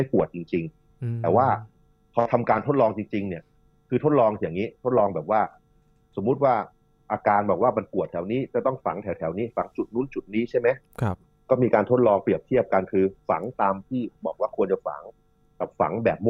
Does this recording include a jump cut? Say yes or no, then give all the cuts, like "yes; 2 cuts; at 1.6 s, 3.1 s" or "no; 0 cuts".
no; 0 cuts